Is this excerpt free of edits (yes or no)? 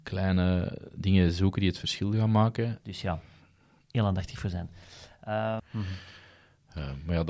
no